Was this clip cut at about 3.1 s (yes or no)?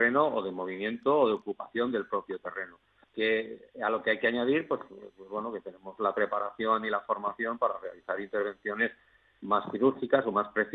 yes